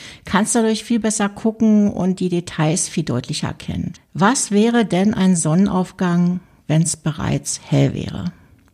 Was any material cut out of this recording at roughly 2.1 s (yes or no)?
no